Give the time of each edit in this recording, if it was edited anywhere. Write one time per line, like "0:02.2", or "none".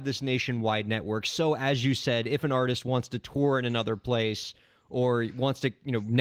none